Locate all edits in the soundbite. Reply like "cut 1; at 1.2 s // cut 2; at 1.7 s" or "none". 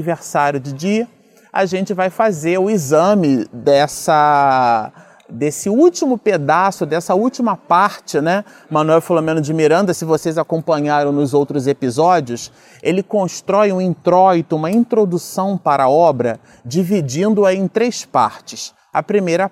none